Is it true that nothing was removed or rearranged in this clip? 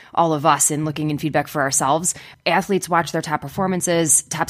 no; 1 cut; at 2.3 s

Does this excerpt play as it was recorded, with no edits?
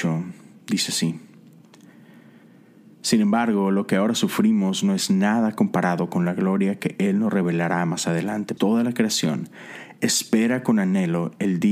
no; 1 cut; at 8.6 s

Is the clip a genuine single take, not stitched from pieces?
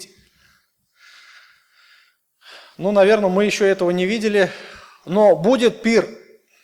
yes; 0 cuts

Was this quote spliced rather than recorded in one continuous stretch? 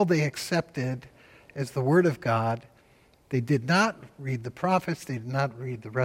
no; 0 cuts

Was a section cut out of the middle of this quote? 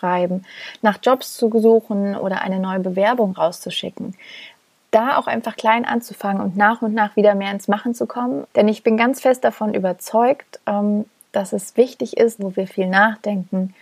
yes; 2 cuts; at 8.5 s, 12.4 s

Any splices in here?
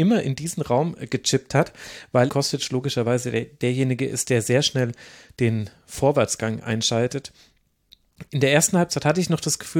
yes; 2 cuts; at 2.3 s, 8.3 s

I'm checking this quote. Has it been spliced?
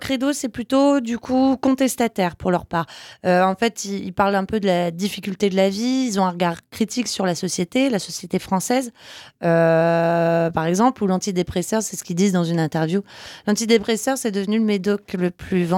no; 0 cuts

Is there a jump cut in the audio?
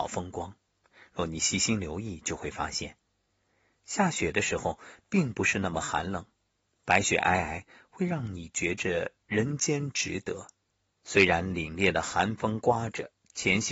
yes; 1 cut; at 11.0 s

